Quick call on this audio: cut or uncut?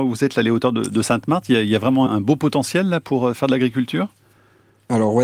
cut